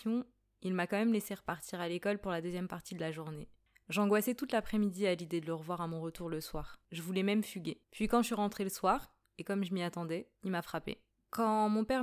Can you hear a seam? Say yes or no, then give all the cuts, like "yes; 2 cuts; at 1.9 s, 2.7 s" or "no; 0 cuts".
no; 0 cuts